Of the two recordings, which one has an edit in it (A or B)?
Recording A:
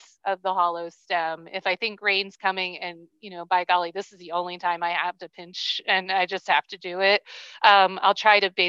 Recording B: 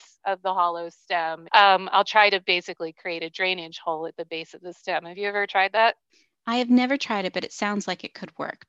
B